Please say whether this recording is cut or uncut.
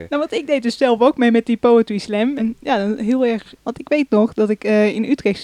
cut